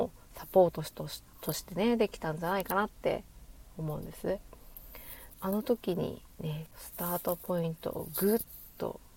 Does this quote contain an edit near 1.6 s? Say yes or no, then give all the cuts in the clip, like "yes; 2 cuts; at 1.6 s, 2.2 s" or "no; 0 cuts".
no; 2 cuts; at 5.3 s, 6.7 s